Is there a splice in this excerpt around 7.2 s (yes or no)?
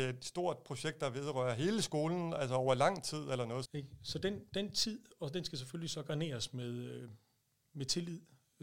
no